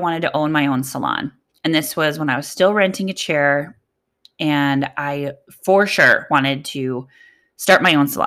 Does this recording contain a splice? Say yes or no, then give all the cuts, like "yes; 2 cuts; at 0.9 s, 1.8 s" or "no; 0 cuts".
no; 0 cuts